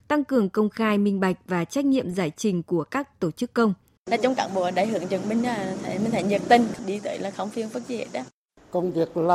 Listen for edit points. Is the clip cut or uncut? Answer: cut